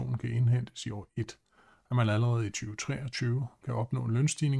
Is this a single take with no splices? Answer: yes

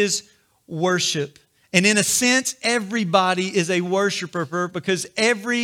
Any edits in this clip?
no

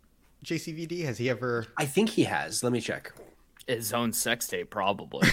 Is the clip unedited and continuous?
yes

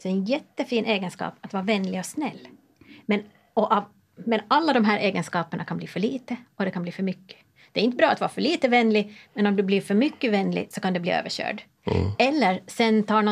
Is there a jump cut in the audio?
no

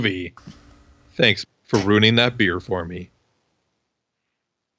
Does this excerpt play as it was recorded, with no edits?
no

